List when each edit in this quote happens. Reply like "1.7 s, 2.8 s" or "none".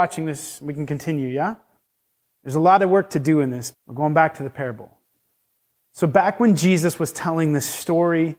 3.7 s